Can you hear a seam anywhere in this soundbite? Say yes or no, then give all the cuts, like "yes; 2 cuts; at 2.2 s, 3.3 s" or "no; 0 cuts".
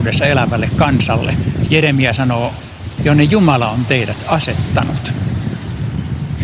yes; 2 cuts; at 1.7 s, 3.0 s